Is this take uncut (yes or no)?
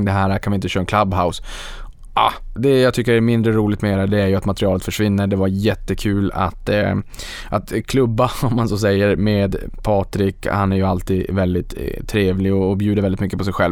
no